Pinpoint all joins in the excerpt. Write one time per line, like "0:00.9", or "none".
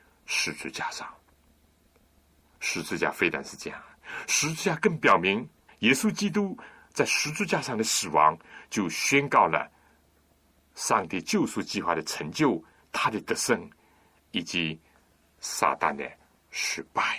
0:05.7